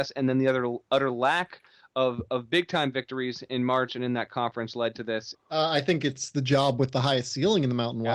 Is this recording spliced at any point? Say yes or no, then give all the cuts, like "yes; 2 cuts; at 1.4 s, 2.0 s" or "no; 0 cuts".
yes; 1 cut; at 5.3 s